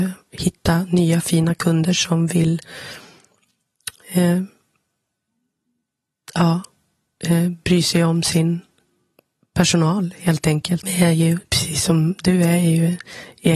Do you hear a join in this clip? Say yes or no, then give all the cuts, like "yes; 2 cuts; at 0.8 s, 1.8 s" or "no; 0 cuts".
yes; 1 cut; at 10.8 s